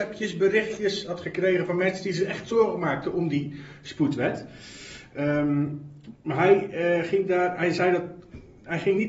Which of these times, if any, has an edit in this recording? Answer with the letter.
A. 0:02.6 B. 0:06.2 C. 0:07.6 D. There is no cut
D